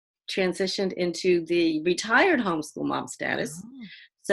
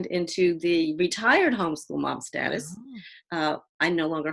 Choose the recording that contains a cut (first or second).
second